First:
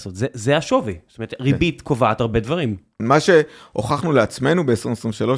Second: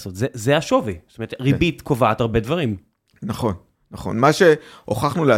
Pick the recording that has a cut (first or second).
first